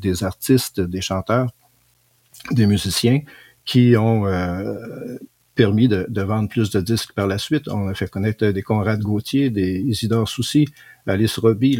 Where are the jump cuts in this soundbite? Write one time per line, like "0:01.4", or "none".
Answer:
none